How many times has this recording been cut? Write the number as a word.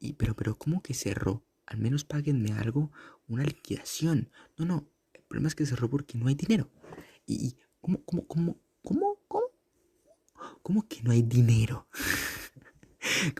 zero